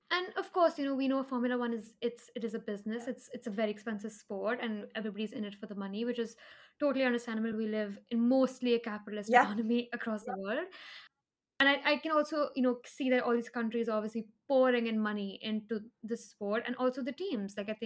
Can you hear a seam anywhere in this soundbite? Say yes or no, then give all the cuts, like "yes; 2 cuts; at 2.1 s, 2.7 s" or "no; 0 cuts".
no; 0 cuts